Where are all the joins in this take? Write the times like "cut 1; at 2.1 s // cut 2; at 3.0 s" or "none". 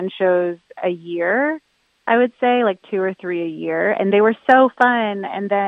none